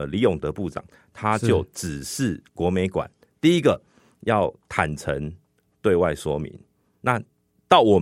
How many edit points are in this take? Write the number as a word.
zero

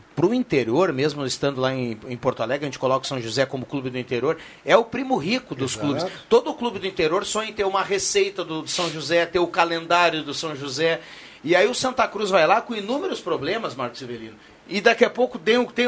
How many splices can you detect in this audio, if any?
one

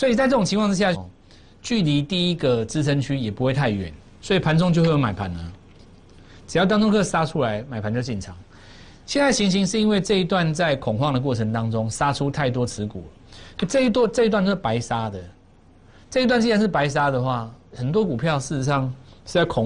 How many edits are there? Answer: one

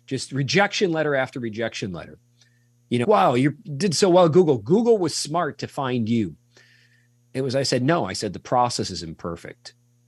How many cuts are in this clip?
one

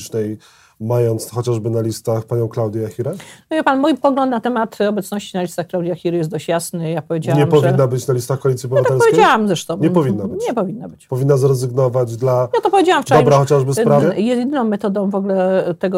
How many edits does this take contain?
one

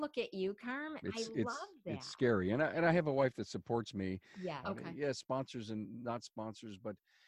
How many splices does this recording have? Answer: two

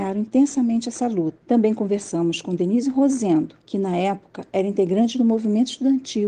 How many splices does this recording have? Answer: two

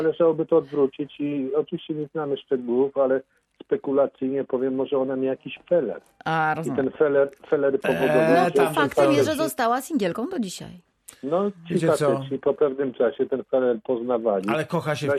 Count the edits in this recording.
zero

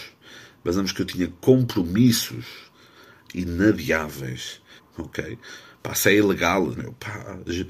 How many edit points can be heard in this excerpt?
two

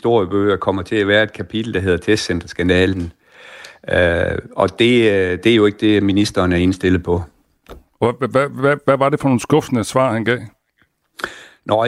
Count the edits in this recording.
zero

